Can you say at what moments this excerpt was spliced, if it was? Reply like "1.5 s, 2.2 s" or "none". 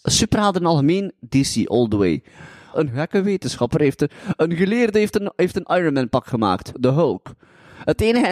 2.7 s, 6.7 s